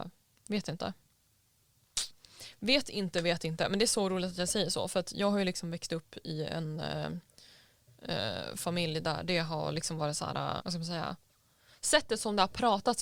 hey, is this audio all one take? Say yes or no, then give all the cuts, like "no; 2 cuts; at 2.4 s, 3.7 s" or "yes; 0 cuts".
no; 1 cut; at 10.6 s